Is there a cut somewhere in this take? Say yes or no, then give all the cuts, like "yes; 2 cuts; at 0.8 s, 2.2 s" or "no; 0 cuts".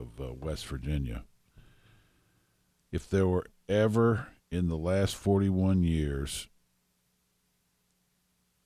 yes; 1 cut; at 2.9 s